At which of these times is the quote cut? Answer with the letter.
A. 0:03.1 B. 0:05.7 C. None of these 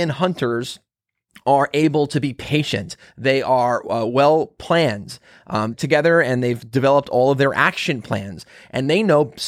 B